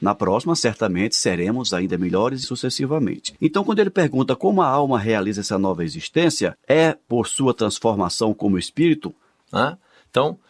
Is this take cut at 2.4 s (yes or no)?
yes